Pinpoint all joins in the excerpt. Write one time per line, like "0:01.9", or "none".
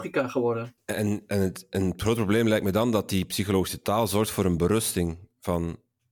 none